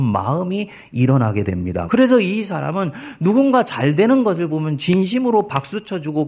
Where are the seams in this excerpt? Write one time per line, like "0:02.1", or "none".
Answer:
0:01.9